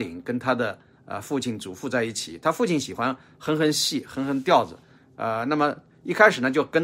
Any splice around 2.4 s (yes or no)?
no